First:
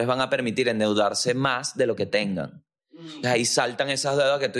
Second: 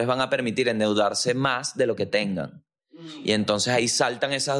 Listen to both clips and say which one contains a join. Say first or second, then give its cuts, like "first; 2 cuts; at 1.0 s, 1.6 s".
first; 1 cut; at 3.2 s